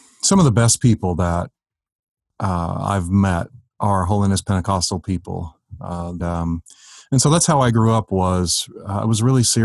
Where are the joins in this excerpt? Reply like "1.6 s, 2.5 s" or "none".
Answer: 6.2 s